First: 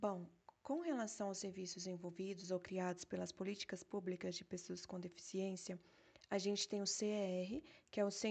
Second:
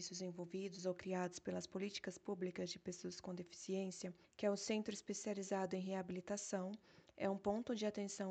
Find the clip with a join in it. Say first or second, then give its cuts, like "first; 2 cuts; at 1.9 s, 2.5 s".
second; 1 cut; at 4.2 s